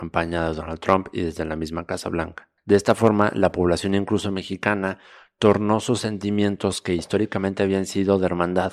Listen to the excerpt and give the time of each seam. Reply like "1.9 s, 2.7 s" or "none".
none